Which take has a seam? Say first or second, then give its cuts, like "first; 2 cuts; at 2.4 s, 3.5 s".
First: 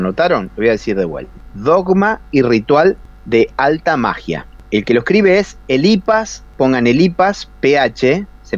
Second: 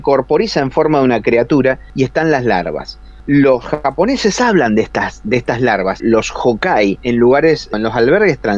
second; 2 cuts; at 6.0 s, 7.0 s